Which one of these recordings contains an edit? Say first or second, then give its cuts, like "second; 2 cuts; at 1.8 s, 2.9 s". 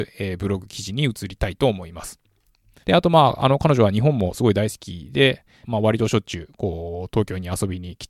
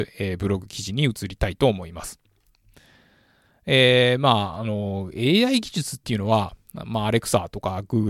first; 2 cuts; at 2.8 s, 5.6 s